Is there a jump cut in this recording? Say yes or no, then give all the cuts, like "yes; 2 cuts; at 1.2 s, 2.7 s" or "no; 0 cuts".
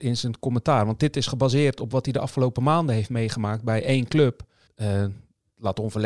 yes; 1 cut; at 4.7 s